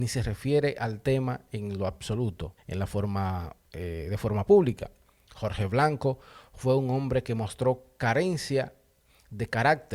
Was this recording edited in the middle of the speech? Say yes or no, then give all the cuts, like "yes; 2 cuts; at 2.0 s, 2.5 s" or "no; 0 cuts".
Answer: yes; 2 cuts; at 2.6 s, 5.2 s